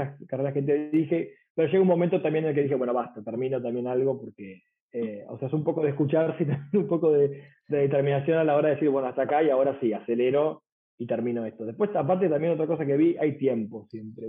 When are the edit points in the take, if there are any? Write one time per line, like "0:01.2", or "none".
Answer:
none